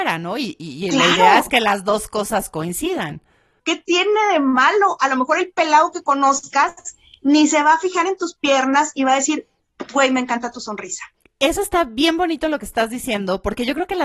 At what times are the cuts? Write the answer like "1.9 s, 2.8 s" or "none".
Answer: 3.6 s